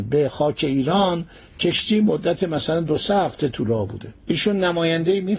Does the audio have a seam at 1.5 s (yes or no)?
no